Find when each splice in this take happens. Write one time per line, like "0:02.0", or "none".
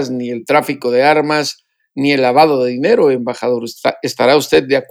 none

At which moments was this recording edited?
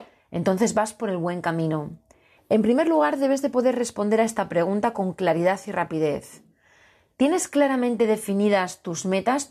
0:02.4

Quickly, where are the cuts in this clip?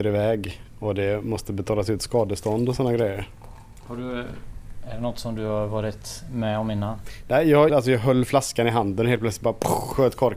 0:07.7

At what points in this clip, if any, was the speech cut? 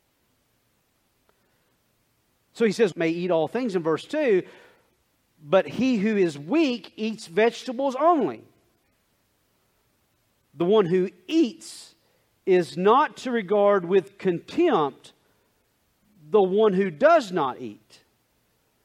0:02.9

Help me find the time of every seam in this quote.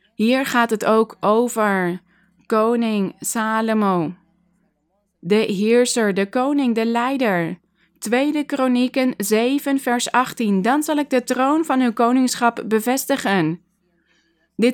none

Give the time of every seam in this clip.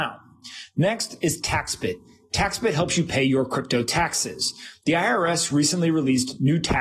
none

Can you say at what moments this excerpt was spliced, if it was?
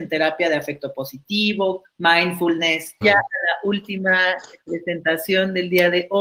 0:01.8
0:03.0

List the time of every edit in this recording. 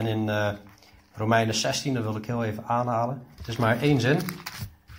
0:03.4

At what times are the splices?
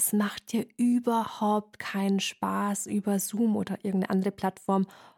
none

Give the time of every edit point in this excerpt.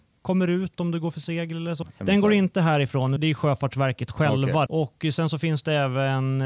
0:01.8
0:03.2
0:04.7

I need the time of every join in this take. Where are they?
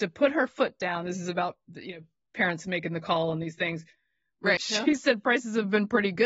0:04.6

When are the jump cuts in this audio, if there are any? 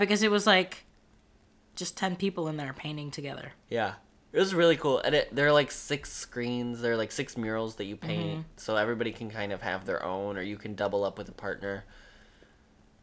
none

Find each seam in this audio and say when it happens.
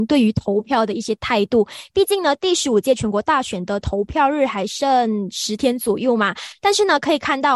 none

